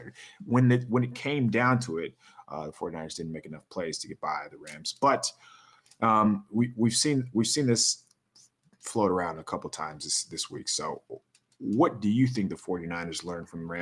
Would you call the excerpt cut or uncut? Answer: uncut